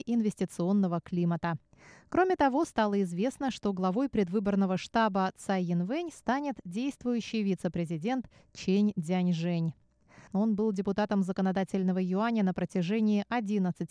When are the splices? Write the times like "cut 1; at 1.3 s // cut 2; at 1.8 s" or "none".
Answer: cut 1; at 10.3 s